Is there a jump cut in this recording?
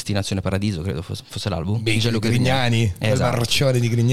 no; 0 cuts

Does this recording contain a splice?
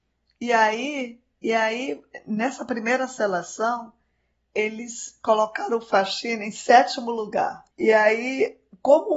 yes; 1 cut; at 7.7 s

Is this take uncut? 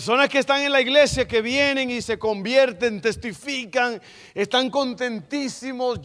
yes; 0 cuts

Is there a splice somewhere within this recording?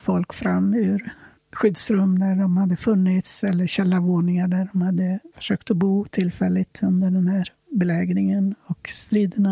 no; 0 cuts

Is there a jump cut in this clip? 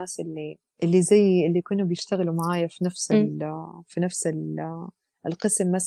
no; 0 cuts

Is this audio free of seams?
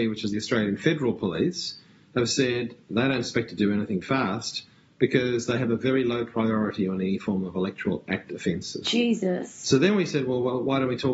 no; 2 cuts; at 4.0 s, 8.8 s

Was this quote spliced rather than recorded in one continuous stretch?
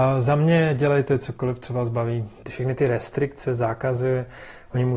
no; 0 cuts

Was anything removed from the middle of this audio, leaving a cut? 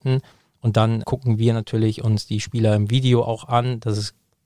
yes; 1 cut; at 1.0 s

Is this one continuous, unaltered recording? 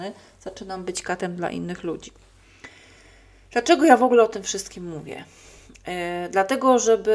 yes; 0 cuts

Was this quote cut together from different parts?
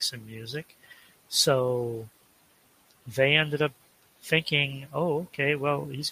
no; 0 cuts

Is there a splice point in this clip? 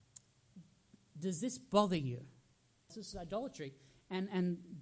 yes; 1 cut; at 2.9 s

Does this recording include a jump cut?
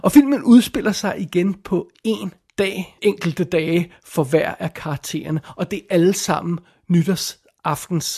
yes; 1 cut; at 3.0 s

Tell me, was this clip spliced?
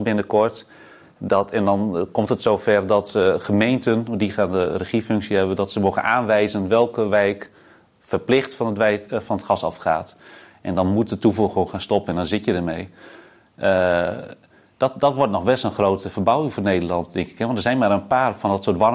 no; 0 cuts

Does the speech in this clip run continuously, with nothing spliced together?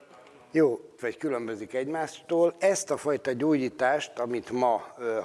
no; 1 cut; at 1.0 s

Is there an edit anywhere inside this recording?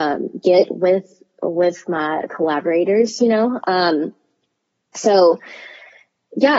no; 0 cuts

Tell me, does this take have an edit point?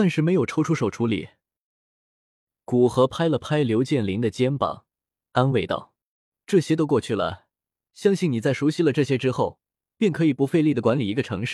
no; 0 cuts

